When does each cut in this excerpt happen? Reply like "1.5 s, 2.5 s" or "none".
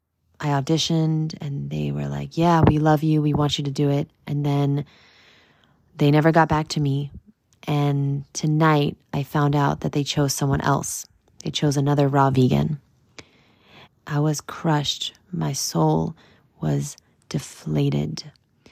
13.9 s